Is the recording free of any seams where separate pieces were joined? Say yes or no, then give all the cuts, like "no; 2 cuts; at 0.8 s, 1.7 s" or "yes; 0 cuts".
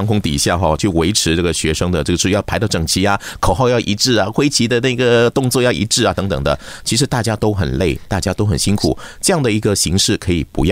yes; 0 cuts